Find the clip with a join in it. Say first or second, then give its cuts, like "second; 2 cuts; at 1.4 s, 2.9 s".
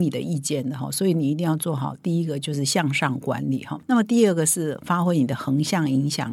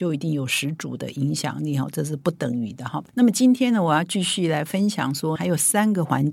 second; 2 cuts; at 3.1 s, 5.4 s